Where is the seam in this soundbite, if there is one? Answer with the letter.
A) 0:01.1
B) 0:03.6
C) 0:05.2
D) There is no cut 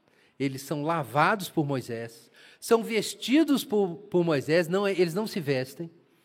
D